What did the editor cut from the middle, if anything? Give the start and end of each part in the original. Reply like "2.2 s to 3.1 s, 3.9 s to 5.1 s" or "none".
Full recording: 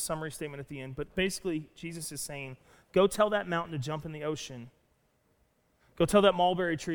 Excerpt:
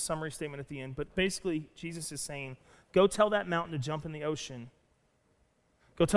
none